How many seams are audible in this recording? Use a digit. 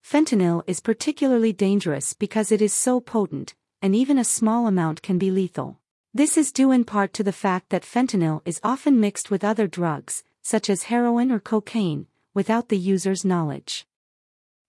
1